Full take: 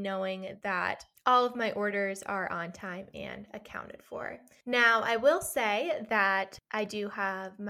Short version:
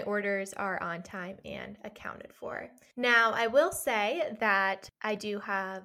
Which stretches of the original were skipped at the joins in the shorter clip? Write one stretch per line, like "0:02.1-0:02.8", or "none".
none